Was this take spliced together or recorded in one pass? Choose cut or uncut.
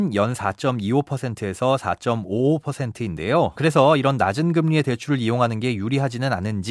cut